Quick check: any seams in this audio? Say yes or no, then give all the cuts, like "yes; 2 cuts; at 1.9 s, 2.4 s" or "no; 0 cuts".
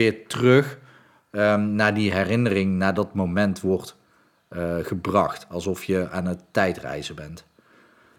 no; 0 cuts